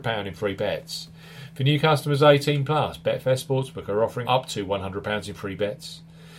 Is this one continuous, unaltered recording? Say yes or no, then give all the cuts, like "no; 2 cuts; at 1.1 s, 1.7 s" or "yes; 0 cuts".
no; 1 cut; at 4.2 s